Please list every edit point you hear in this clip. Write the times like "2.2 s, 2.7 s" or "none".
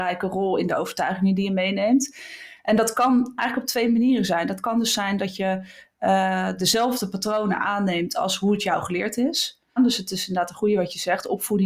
9.8 s